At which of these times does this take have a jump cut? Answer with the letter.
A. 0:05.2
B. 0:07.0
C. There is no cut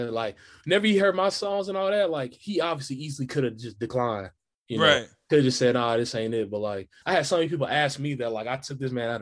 B